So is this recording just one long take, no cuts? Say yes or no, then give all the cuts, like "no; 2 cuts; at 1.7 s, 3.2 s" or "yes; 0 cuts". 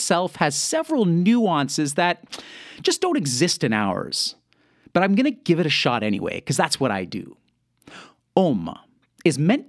yes; 0 cuts